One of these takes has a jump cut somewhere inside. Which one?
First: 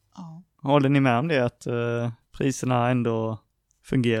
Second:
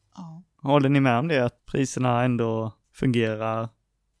second; 2 cuts; at 1.6 s, 2.8 s

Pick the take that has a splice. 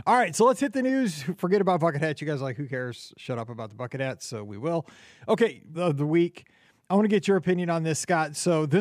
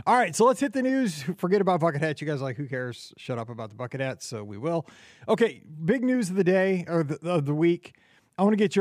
first; 1 cut; at 5.7 s

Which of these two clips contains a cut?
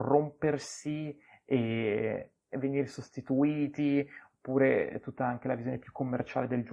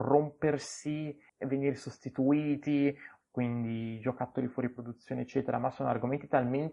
second; 2 cuts; at 1.3 s, 3.2 s

